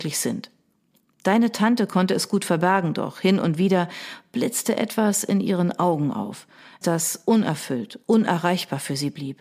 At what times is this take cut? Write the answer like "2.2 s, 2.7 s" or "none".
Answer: 6.8 s